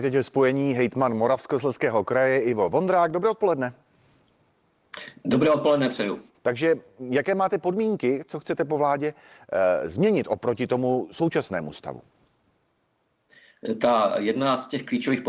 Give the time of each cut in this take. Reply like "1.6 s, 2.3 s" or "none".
6.3 s